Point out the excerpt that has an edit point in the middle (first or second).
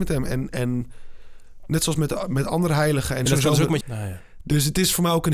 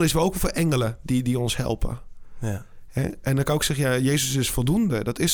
first